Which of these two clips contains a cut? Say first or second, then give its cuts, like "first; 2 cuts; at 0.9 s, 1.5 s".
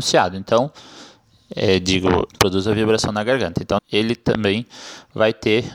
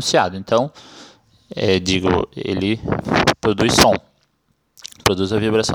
first; 2 cuts; at 2.3 s, 3.8 s